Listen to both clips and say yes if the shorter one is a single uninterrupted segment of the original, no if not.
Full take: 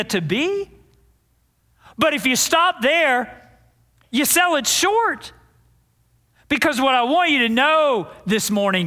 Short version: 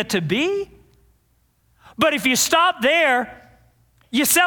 yes